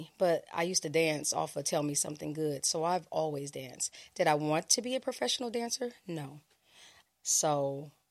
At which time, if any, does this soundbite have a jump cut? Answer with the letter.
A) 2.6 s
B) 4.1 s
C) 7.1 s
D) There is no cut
C